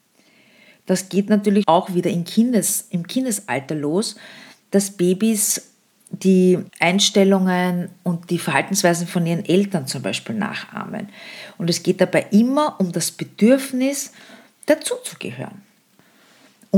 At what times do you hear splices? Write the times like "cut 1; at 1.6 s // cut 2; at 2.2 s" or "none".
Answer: cut 1; at 1.6 s // cut 2; at 6.7 s